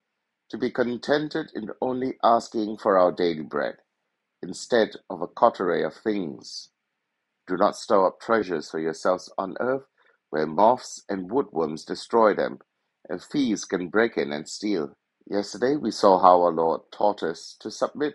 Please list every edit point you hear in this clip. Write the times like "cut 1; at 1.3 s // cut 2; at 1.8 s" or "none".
cut 1; at 7.3 s // cut 2; at 15.1 s